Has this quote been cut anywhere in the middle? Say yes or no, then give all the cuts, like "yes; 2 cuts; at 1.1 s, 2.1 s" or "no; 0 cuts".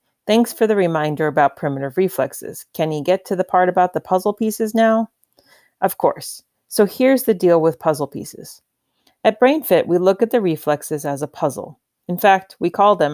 no; 0 cuts